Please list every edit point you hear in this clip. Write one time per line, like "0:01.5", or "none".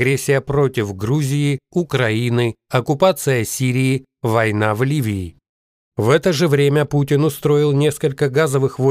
none